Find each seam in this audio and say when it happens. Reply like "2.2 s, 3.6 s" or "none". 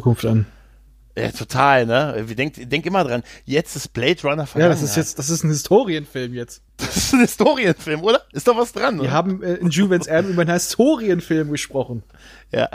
6.7 s